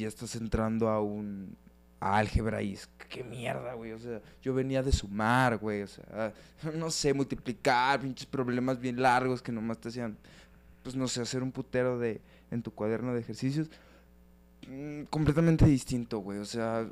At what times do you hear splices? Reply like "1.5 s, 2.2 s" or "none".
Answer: none

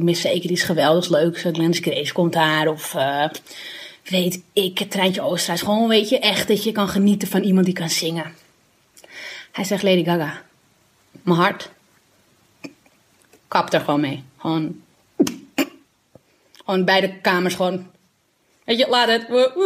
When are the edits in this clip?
none

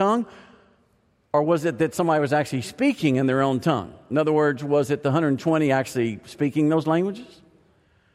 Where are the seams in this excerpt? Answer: none

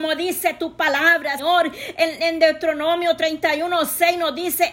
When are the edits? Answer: 1.4 s

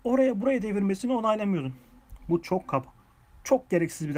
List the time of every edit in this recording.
none

